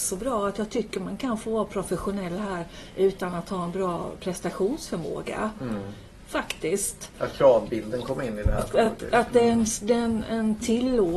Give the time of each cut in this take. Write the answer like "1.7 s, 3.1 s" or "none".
none